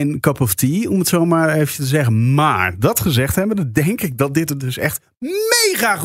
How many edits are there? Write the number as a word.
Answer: zero